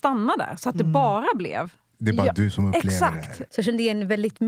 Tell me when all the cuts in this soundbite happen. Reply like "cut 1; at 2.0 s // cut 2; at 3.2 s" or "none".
cut 1; at 3.5 s